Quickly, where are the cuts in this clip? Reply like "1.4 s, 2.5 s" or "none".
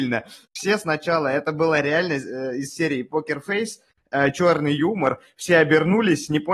none